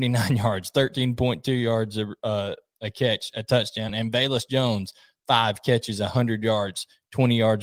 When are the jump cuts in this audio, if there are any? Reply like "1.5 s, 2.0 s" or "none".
none